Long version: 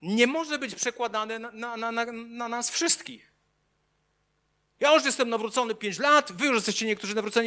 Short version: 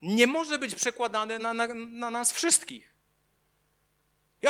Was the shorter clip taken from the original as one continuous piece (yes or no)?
no